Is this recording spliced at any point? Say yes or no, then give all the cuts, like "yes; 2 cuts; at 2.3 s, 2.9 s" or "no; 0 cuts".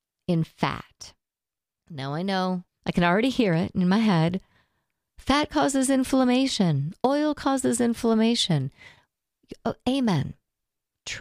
yes; 1 cut; at 1.8 s